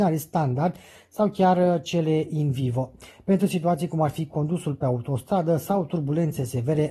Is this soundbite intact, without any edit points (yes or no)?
yes